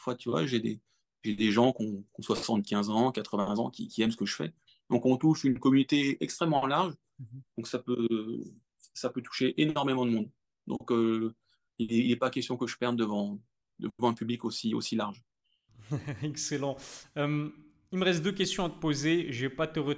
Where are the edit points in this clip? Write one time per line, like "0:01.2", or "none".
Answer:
none